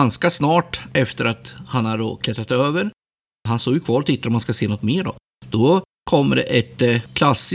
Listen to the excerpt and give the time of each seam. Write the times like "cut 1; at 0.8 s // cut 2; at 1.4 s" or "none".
none